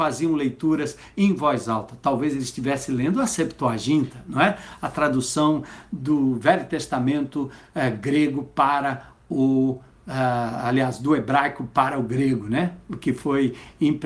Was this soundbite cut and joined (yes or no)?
no